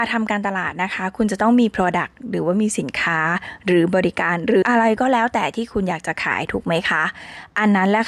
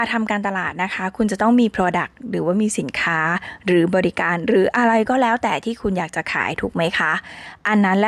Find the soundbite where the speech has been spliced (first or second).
first